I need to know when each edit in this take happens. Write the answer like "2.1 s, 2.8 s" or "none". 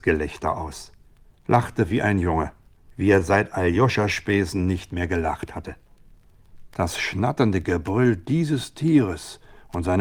2.9 s, 6.7 s